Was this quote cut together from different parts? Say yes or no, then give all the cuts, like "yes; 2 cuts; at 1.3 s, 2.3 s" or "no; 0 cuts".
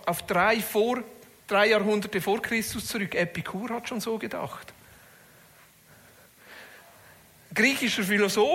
no; 0 cuts